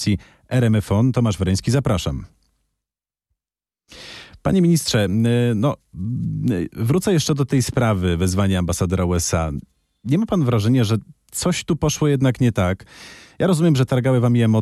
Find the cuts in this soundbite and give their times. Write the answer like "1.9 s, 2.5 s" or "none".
none